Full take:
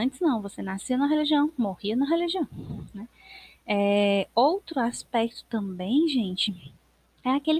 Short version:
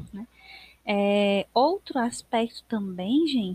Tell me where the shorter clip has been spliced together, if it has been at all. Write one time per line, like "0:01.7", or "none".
none